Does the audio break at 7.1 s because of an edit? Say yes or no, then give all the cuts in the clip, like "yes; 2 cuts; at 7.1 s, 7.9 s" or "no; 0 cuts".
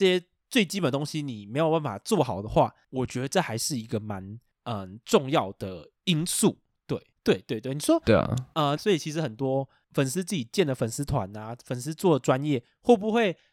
yes; 3 cuts; at 2.8 s, 7.1 s, 8.8 s